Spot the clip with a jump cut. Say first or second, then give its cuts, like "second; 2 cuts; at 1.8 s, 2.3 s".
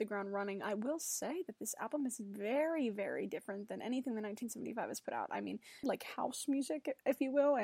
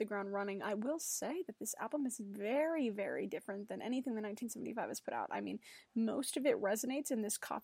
first; 1 cut; at 5.8 s